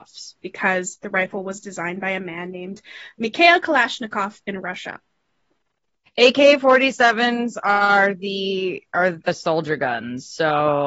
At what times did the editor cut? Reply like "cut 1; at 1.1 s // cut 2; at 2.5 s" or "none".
cut 1; at 6.1 s // cut 2; at 9.2 s